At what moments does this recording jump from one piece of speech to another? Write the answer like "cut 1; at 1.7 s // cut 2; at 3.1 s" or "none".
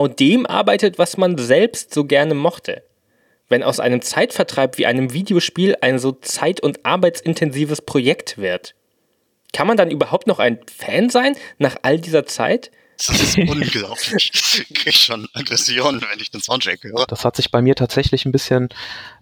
cut 1; at 13.0 s // cut 2; at 17.1 s